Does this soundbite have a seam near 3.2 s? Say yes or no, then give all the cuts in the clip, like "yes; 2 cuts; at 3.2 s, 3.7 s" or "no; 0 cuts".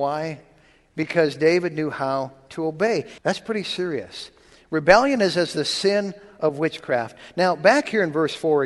yes; 1 cut; at 3.2 s